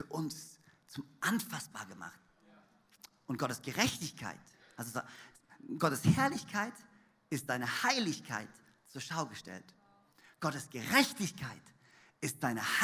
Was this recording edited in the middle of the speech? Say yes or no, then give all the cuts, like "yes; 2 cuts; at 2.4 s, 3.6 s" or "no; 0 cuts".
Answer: no; 0 cuts